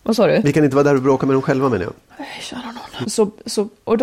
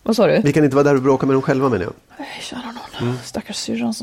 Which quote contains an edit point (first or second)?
first